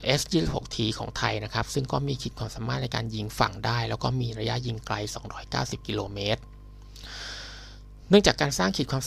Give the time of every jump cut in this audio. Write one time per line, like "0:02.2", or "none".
none